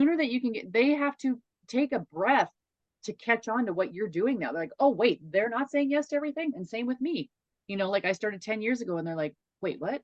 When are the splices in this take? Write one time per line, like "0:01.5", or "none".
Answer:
0:06.5